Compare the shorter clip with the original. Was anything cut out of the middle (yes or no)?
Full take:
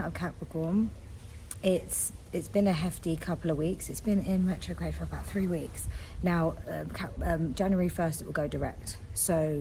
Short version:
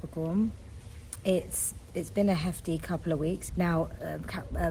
yes